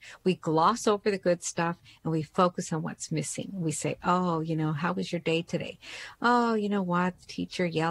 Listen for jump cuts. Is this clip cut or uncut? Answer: uncut